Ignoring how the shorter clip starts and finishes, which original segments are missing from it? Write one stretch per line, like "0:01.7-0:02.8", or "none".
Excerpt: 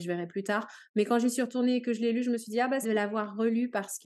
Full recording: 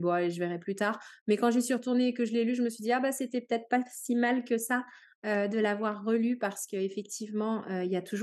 0:03.1-0:05.5